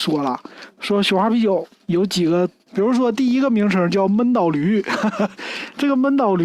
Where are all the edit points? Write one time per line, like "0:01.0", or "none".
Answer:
0:02.7